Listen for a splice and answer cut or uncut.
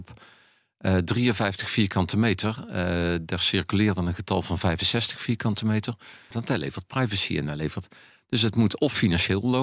cut